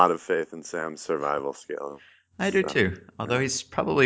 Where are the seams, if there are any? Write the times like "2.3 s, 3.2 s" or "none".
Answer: none

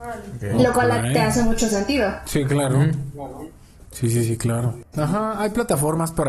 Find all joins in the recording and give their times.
4.9 s

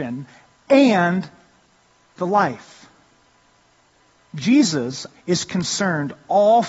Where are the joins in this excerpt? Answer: 5.1 s

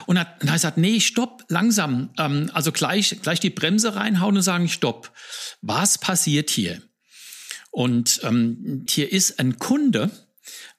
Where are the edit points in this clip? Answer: 8.9 s

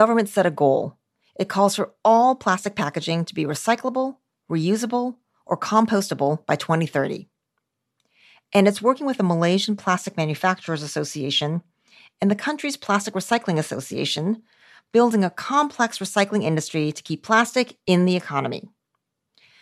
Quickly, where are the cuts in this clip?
none

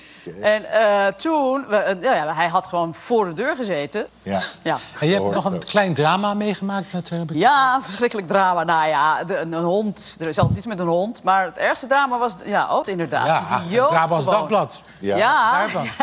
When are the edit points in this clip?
4.1 s, 12.8 s

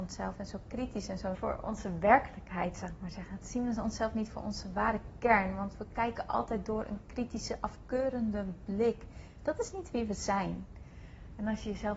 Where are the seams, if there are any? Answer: 1.3 s

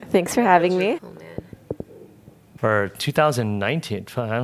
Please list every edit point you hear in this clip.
1.0 s, 2.6 s

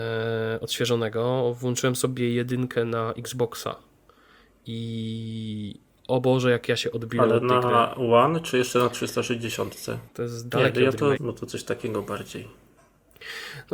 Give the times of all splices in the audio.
10.1 s, 11.2 s

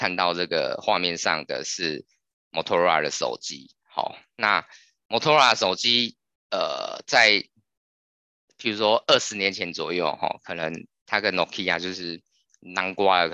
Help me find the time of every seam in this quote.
none

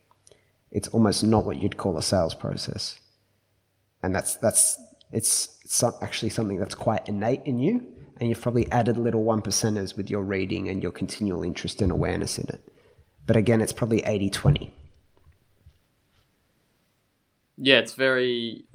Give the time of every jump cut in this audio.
none

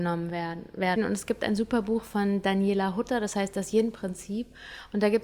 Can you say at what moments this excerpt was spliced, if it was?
1.0 s

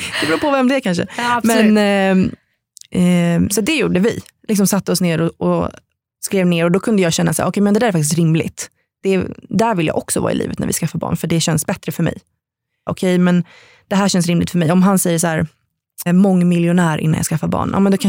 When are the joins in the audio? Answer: 12.9 s, 16.1 s

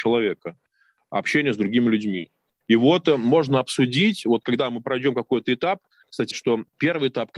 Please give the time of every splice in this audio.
2.6 s, 6.3 s

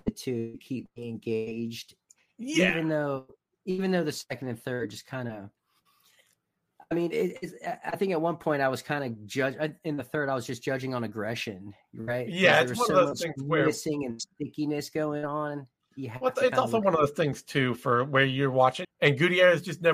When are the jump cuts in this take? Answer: 18.8 s

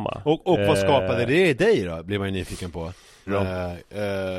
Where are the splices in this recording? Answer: 3.3 s

